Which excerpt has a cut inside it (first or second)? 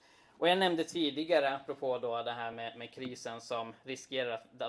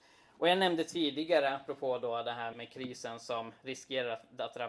second